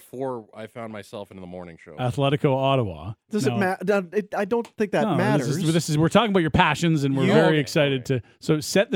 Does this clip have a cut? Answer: no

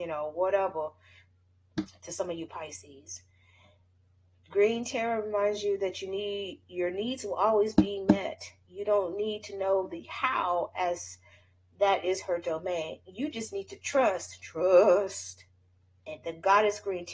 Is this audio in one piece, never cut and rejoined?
yes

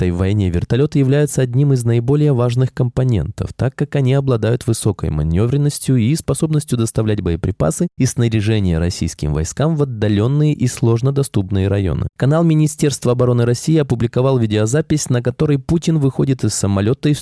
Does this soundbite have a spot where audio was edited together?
yes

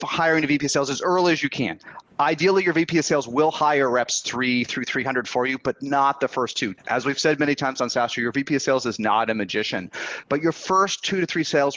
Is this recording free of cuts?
no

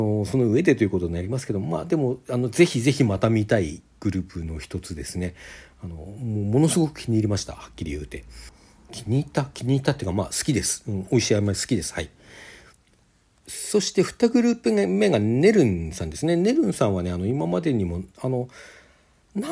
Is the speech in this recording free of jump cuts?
yes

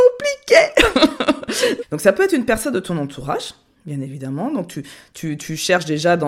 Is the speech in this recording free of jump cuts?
no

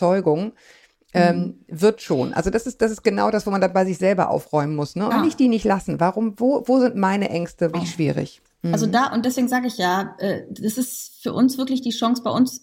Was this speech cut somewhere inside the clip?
yes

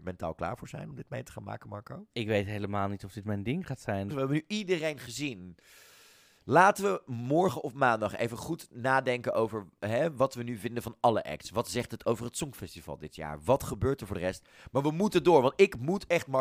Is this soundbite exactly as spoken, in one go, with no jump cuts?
no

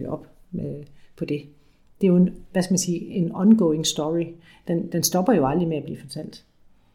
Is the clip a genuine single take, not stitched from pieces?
yes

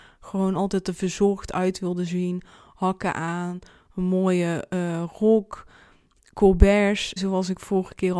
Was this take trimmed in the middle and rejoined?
yes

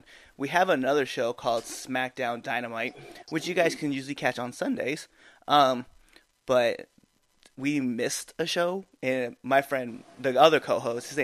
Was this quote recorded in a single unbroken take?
yes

